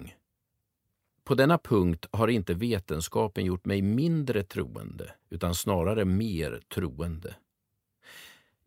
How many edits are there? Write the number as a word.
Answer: one